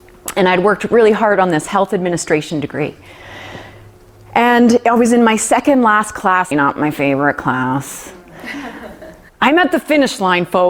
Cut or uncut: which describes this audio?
cut